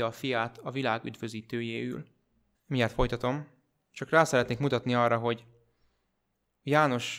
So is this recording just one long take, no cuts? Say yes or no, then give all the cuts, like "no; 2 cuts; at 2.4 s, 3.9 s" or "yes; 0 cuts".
no; 1 cut; at 2.5 s